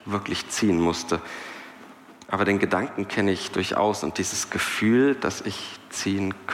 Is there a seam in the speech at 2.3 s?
no; 0 cuts

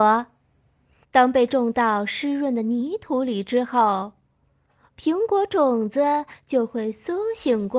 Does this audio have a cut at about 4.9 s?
no; 1 cut; at 1.0 s

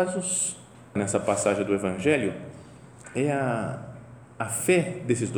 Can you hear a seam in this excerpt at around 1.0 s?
yes; 1 cut; at 1.0 s

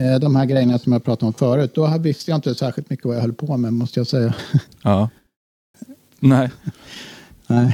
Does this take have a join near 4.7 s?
yes; 2 cuts; at 4.7 s, 6.1 s

